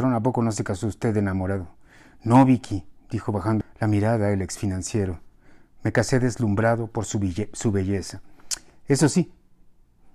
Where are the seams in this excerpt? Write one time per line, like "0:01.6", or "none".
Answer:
0:03.6